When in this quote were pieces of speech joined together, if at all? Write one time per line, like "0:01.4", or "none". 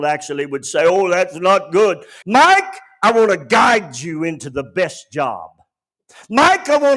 0:02.2